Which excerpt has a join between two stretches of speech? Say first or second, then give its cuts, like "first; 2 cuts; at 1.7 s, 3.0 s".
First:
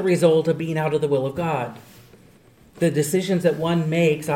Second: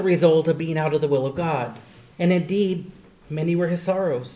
second; 1 cut; at 2.1 s